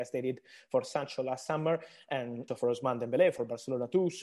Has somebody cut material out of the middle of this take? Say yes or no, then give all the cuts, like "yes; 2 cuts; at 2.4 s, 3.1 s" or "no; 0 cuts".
yes; 1 cut; at 2.5 s